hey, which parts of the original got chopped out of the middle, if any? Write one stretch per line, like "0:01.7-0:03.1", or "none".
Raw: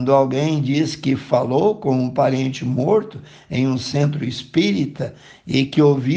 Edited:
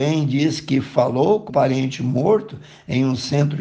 0:01.8-0:02.1